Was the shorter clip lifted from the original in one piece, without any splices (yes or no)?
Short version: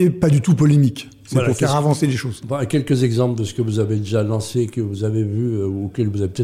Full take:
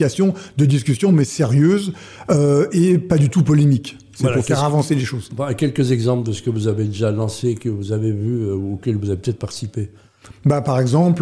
yes